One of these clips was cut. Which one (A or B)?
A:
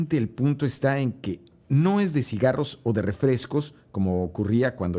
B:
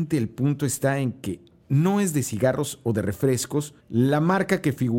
B